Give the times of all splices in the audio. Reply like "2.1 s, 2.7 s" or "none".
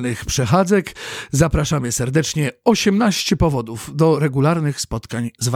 none